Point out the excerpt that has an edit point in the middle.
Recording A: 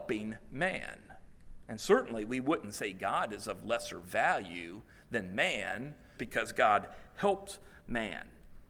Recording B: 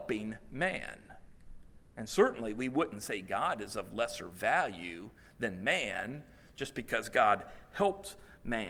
A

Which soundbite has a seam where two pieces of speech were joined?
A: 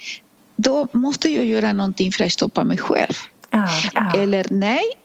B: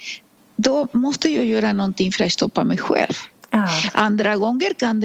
A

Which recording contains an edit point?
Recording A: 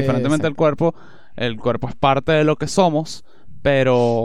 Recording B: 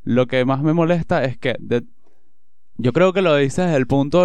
B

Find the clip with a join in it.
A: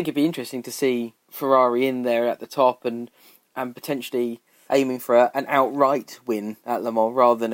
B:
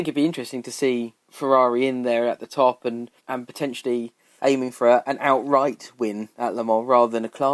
B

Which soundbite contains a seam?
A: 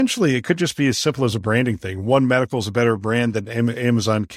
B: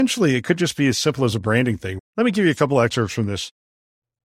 B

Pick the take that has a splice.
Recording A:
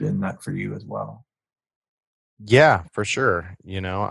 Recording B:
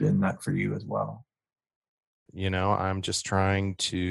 B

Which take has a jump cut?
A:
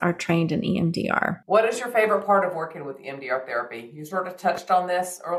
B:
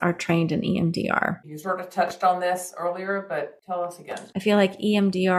B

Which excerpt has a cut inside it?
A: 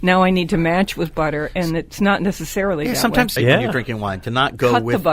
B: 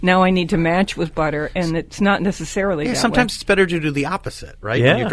A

